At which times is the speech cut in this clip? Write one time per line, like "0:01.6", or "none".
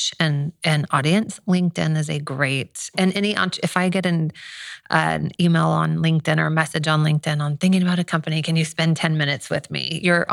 none